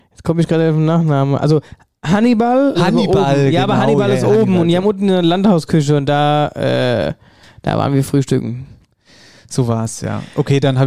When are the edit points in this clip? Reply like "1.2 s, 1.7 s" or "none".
2.7 s